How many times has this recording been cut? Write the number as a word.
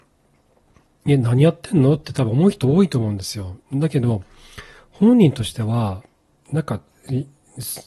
one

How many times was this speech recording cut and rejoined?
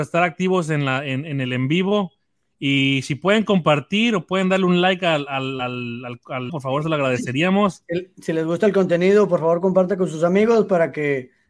one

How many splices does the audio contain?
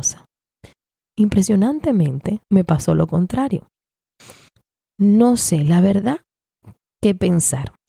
two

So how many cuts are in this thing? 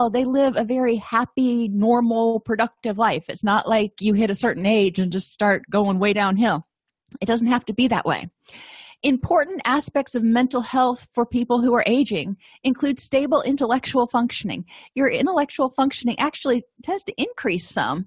zero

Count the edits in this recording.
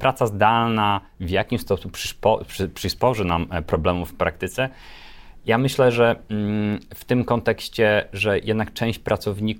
zero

